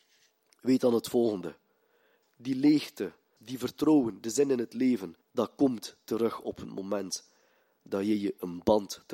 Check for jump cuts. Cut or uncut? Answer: cut